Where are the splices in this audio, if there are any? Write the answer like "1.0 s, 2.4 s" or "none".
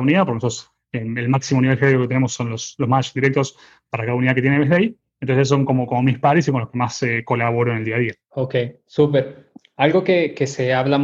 none